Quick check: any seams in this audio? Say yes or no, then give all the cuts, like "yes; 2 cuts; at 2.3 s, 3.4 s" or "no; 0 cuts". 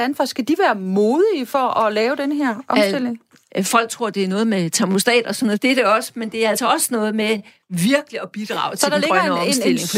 yes; 1 cut; at 3.5 s